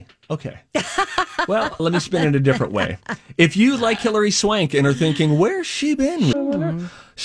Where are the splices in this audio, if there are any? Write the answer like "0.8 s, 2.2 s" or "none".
1.8 s, 6.3 s